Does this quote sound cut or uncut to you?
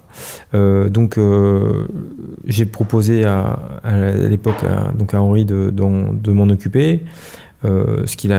cut